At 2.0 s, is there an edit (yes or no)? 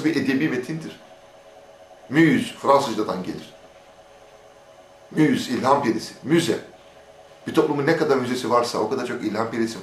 yes